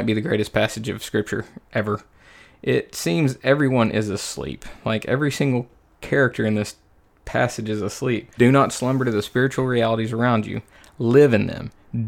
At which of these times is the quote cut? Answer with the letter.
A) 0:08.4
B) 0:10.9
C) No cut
A